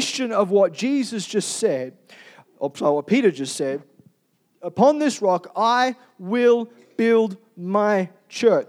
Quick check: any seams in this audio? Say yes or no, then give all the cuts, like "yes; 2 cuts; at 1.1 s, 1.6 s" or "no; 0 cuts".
no; 0 cuts